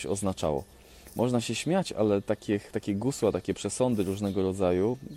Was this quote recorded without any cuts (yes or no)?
yes